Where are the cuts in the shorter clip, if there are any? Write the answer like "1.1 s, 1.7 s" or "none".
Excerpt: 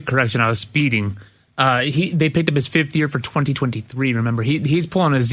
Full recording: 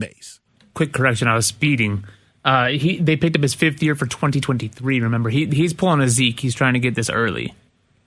none